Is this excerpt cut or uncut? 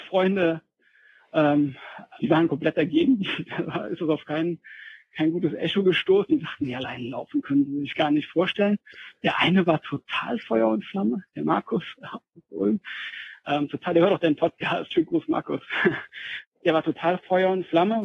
cut